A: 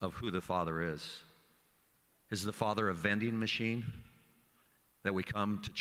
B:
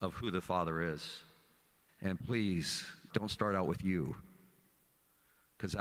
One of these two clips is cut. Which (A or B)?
B